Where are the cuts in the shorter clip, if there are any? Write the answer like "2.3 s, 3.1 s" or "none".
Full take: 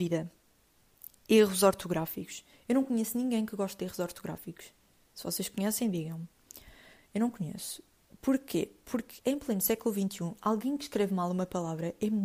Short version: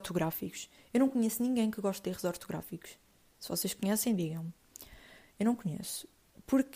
none

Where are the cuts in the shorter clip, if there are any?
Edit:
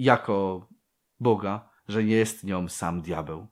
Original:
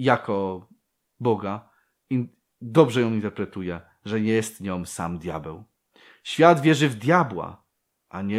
1.8 s

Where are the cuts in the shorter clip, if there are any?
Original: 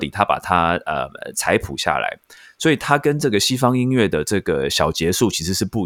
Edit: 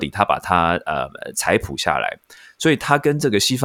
none

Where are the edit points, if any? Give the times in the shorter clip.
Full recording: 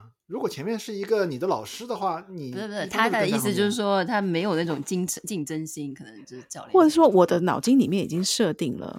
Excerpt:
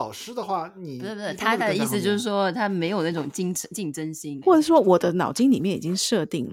4.4 s

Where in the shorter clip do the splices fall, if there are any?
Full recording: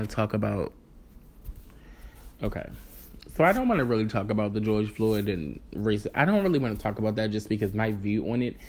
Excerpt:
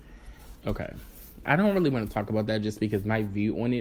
1.4 s

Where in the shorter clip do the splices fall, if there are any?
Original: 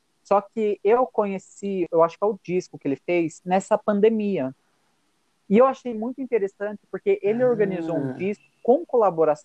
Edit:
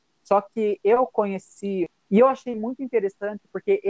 1.9 s

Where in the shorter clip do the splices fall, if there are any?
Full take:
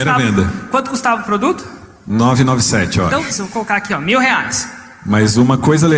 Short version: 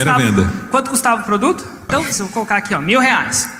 1.9 s

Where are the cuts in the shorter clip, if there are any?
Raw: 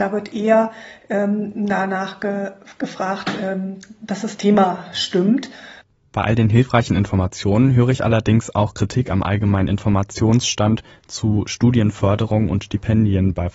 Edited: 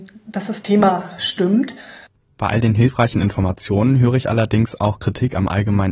none

